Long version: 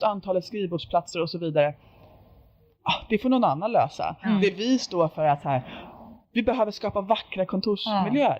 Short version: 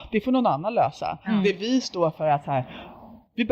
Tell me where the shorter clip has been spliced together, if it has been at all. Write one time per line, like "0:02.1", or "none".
none